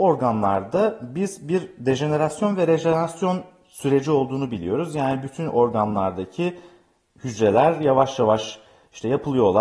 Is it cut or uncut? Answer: uncut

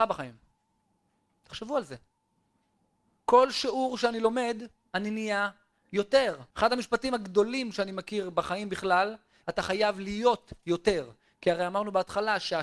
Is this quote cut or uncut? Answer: cut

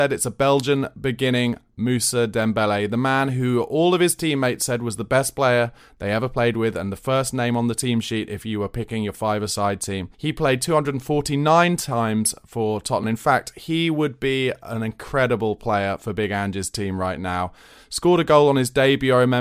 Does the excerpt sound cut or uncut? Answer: cut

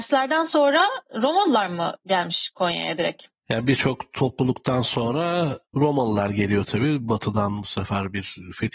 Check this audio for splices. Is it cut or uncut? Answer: uncut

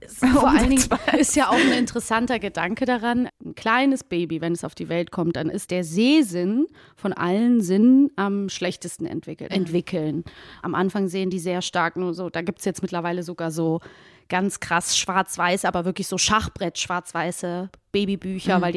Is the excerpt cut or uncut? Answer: cut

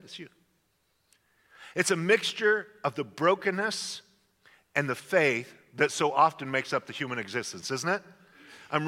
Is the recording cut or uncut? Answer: uncut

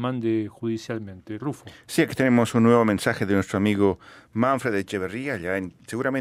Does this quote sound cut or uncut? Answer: uncut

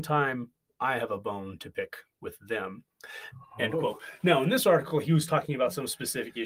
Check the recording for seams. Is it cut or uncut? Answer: uncut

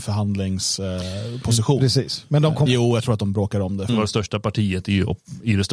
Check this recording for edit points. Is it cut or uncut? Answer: cut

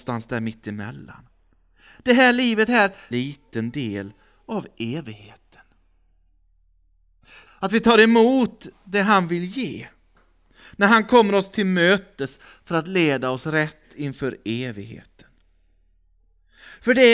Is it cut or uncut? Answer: cut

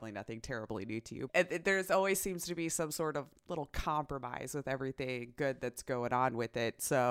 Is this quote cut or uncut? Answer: cut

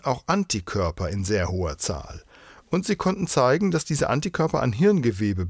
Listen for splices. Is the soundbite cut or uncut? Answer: uncut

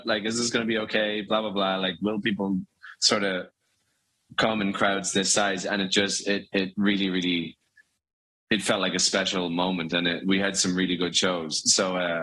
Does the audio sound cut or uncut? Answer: uncut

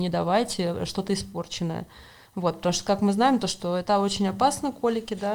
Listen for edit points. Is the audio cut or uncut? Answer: cut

